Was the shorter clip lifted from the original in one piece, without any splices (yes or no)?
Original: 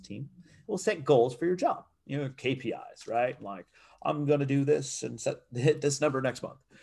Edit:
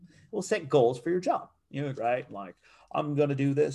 no